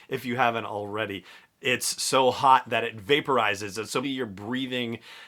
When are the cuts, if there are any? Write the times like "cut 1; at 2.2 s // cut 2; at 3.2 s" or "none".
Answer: cut 1; at 1.6 s // cut 2; at 4.0 s

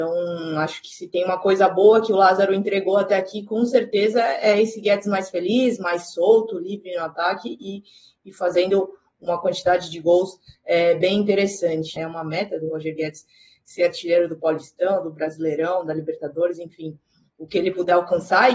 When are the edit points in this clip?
cut 1; at 12.0 s

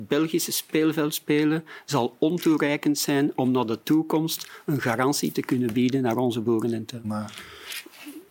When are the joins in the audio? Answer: cut 1; at 7.0 s

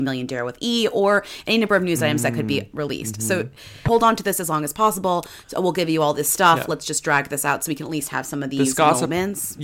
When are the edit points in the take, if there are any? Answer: cut 1; at 3.9 s

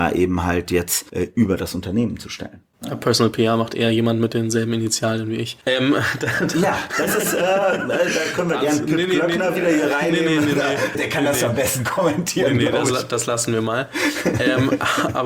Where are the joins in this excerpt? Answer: cut 1; at 10.9 s

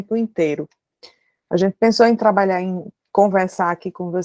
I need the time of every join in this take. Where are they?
cut 1; at 1.4 s

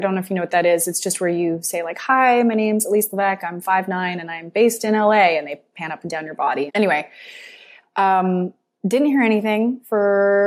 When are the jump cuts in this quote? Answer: cut 1; at 6.7 s

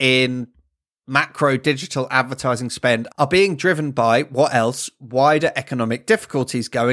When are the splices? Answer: none

